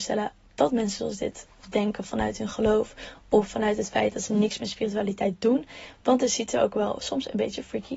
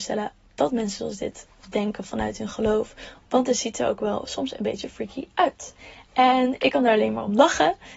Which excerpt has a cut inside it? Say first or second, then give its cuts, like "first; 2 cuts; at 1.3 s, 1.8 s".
second; 1 cut; at 3.2 s